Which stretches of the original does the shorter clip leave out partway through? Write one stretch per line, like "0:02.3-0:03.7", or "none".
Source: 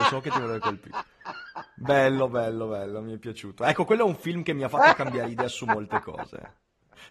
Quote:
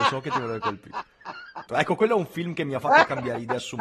0:01.7-0:03.6